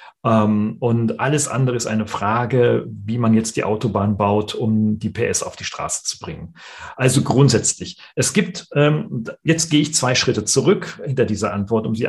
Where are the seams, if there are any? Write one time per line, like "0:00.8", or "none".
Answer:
none